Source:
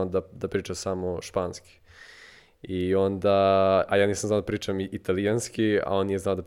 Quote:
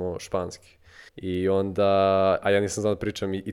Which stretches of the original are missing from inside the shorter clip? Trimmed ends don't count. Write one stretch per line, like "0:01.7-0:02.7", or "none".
0:02.1-0:02.5